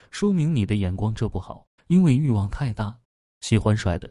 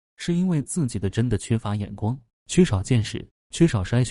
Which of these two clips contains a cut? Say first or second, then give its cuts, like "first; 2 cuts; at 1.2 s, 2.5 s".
first; 1 cut; at 1.8 s